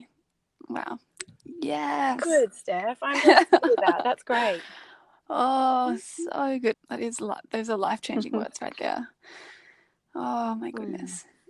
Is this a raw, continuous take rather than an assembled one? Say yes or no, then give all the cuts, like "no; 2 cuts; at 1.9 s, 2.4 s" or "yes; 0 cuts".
no; 1 cut; at 6.7 s